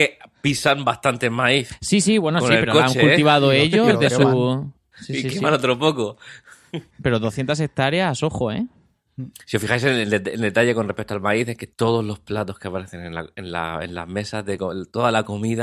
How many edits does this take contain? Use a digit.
1